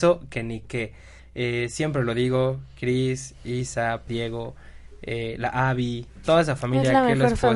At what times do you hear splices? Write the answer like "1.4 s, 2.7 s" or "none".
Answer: 1.2 s, 4.1 s, 6.1 s

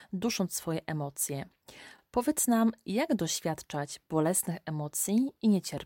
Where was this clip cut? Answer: none

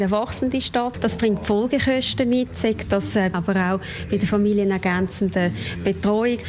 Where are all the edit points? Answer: 0.9 s, 3.3 s

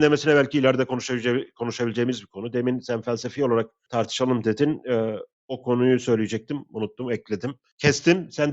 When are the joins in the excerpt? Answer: none

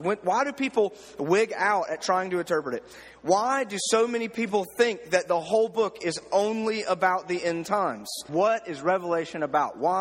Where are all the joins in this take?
8.3 s

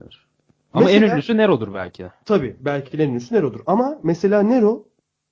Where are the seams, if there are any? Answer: none

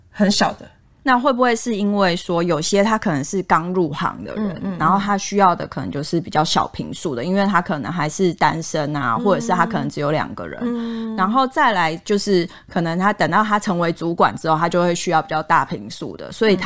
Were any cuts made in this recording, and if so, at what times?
1.0 s

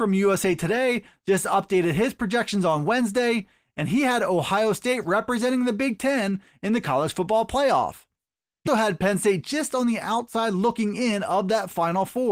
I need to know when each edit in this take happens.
8.7 s

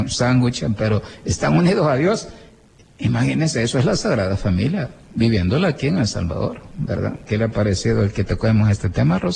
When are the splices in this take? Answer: 7.3 s

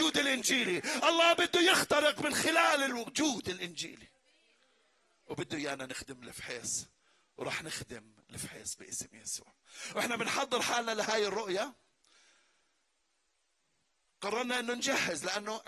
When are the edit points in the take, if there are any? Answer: none

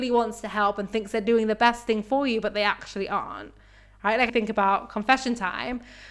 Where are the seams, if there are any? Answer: 4.3 s

